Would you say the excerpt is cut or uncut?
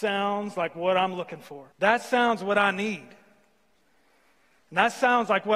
cut